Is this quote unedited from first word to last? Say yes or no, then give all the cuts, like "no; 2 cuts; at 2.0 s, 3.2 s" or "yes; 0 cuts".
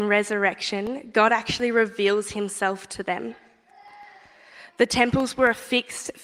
yes; 0 cuts